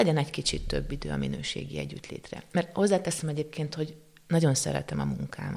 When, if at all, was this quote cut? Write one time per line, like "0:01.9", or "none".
0:02.5